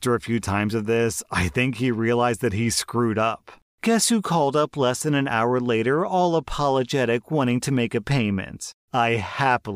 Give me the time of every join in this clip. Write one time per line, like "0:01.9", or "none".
none

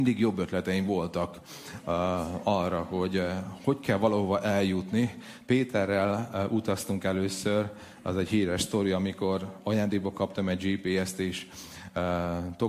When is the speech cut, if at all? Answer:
none

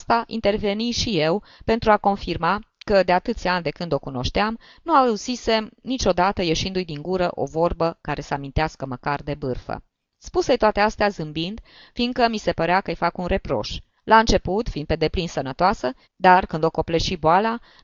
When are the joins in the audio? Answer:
0:13.9
0:16.0

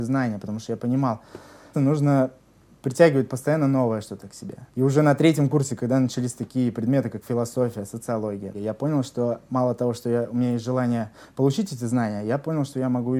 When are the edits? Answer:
0:01.7
0:04.7
0:08.5

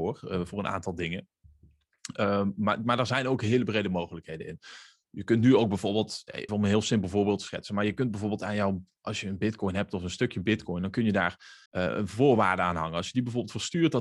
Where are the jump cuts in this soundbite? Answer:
0:06.5
0:11.7

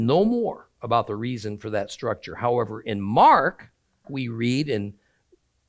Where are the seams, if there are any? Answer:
0:04.0

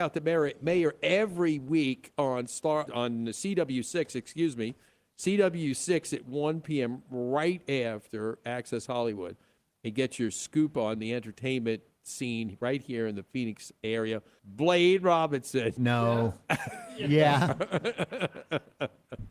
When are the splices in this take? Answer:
0:02.9
0:14.4
0:15.8

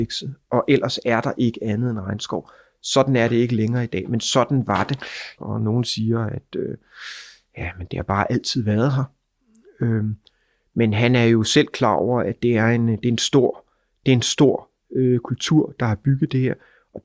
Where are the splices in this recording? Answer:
0:05.4

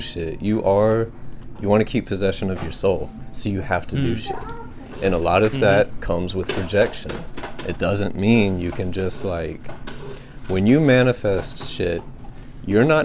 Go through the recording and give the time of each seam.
0:01.6

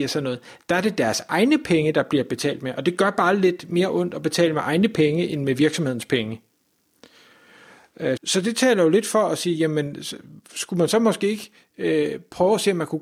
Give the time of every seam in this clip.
0:08.2

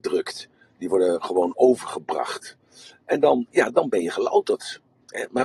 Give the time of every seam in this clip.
0:03.5

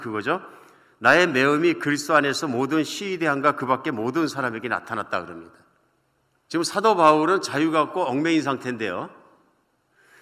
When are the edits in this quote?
none

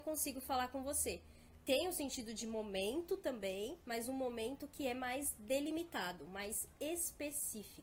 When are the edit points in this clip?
none

